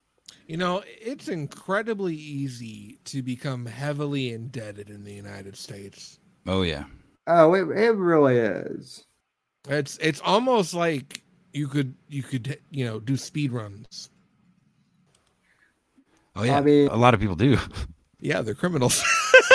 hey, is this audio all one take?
no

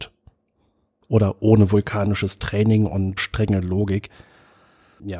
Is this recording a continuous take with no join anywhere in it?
no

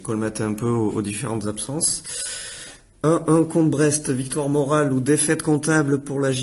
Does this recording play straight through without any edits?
yes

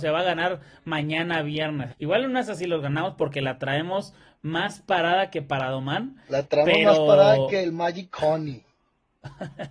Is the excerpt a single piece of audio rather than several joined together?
no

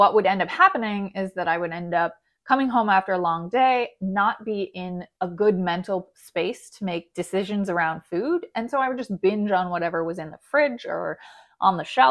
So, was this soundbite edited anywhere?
no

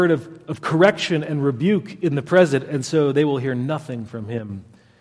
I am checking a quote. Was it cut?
no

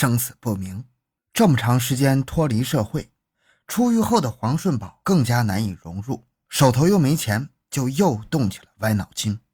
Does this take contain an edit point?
yes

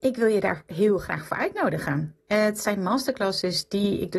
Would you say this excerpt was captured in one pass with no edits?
yes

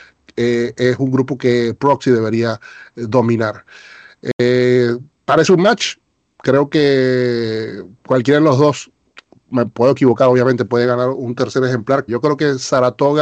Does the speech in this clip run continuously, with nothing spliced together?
no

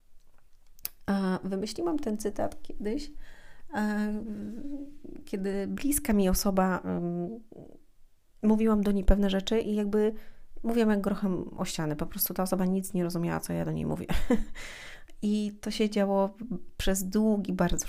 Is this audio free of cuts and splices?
yes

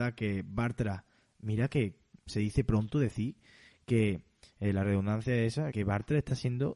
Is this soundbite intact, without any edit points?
no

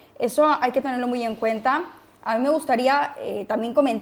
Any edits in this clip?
no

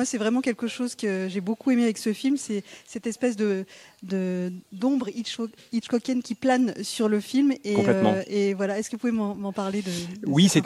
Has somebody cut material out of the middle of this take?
no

